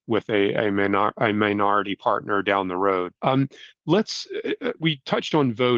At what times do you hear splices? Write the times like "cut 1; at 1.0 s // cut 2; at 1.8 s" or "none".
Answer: cut 1; at 3.2 s // cut 2; at 4.8 s